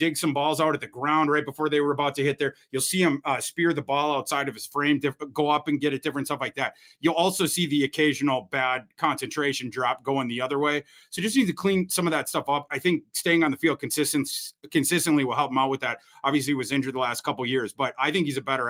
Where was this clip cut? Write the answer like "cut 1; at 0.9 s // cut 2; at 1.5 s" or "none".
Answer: cut 1; at 12.7 s